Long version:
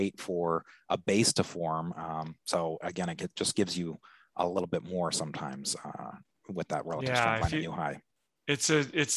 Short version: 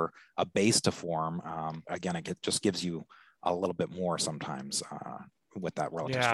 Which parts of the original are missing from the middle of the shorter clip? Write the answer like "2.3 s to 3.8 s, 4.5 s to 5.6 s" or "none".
2.4 s to 2.8 s